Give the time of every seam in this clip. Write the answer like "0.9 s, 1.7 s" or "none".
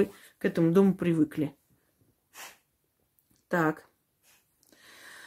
none